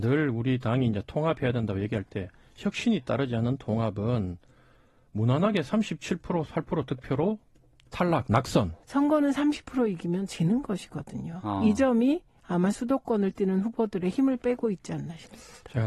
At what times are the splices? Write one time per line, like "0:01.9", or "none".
0:08.8